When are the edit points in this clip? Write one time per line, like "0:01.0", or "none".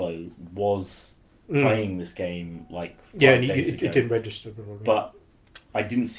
none